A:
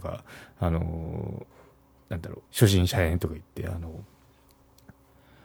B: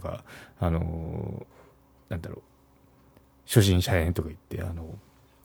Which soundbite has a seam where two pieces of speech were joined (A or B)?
A